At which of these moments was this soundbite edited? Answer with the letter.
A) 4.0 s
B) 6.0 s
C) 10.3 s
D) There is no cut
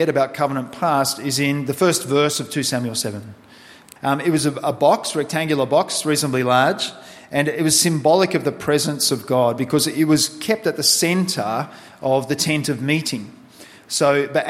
A